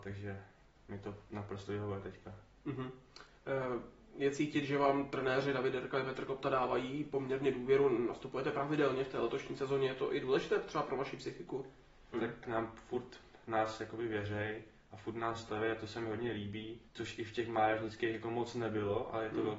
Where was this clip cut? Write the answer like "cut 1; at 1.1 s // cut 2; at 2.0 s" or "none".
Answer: cut 1; at 12.1 s // cut 2; at 16.9 s